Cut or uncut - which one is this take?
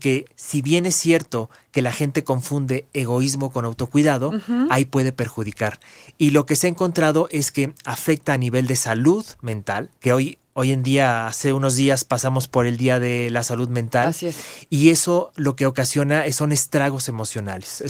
cut